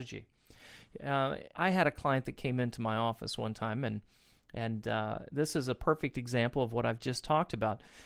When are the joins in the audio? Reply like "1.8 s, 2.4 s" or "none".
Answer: 1.5 s